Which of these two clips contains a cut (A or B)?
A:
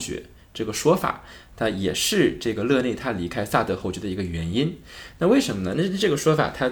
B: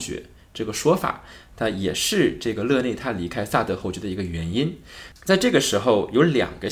B